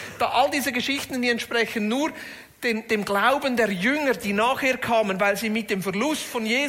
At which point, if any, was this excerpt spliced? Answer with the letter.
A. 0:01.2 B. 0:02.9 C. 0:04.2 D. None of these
D